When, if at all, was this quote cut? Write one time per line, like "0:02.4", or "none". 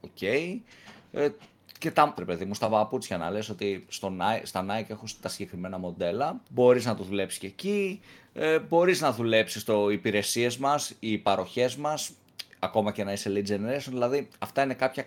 0:02.2
0:06.4

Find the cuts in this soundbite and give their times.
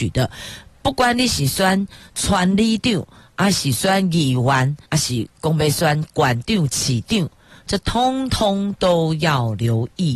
0:04.8

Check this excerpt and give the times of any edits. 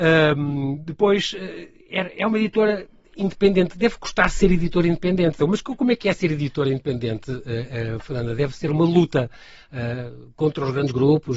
0:05.4

